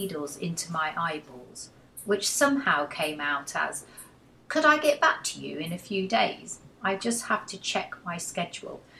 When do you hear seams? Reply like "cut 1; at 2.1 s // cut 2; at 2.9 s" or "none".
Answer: none

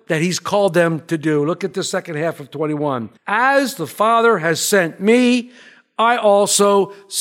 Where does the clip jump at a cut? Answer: cut 1; at 3.2 s

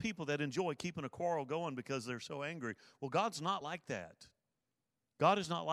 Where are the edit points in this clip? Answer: none

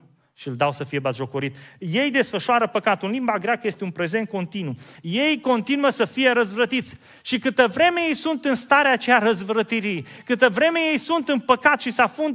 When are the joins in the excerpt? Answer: none

